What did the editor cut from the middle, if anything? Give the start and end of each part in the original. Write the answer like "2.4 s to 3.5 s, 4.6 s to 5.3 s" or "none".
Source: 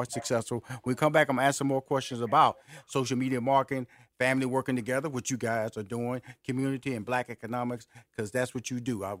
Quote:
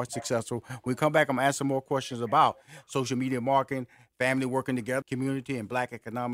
5.0 s to 6.4 s